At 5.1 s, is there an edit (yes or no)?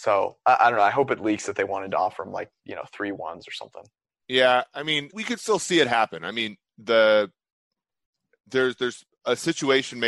yes